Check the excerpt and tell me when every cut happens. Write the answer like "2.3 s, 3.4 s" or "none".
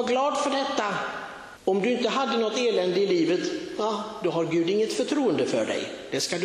1.6 s